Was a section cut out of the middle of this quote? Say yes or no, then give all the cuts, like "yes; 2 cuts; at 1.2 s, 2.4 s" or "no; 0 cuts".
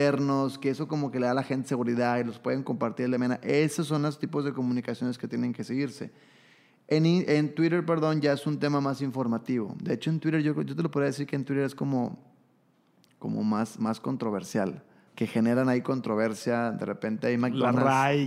yes; 1 cut; at 15.1 s